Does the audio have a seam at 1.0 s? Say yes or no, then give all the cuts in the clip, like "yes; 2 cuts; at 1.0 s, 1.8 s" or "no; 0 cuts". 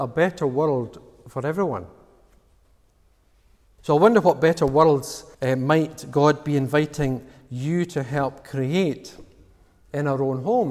no; 2 cuts; at 3.8 s, 5.3 s